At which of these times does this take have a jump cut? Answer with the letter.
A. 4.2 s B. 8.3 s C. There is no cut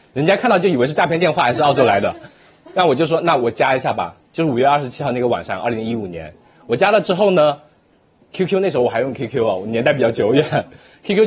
C